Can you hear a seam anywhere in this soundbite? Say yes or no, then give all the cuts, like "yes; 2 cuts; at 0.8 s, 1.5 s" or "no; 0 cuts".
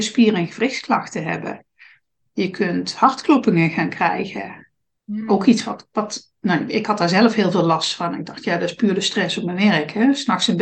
no; 0 cuts